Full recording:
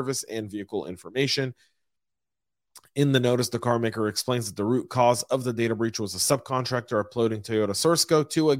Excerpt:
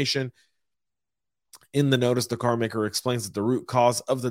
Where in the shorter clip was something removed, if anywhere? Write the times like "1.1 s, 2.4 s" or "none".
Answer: none